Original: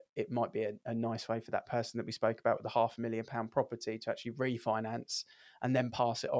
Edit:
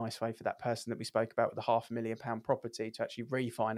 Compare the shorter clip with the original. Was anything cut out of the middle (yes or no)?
no